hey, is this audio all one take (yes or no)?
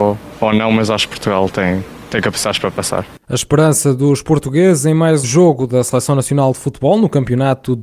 no